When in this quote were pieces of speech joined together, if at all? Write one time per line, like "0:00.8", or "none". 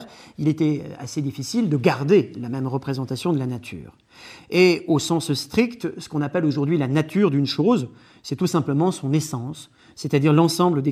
0:04.4